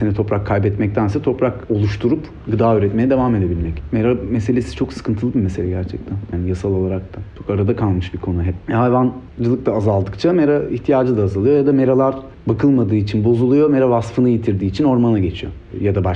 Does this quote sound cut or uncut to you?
cut